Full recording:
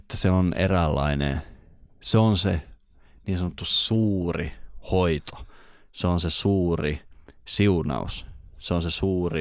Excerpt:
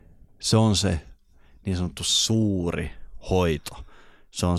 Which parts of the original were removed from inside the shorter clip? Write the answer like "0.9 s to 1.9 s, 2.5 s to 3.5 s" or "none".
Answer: none